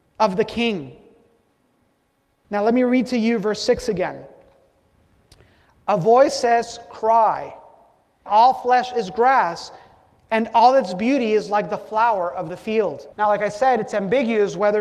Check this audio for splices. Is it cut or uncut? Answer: cut